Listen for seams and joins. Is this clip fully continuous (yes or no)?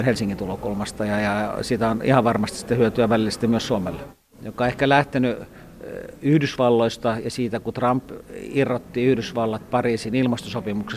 no